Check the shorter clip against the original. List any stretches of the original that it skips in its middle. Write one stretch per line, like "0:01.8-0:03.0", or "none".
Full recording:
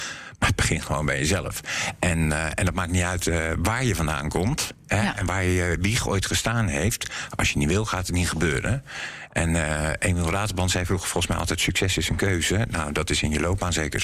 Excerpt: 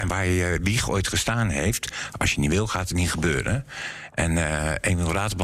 none